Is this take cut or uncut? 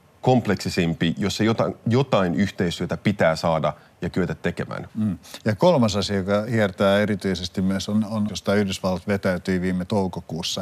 cut